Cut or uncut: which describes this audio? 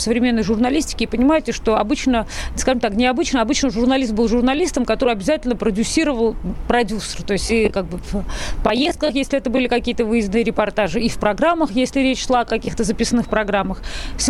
uncut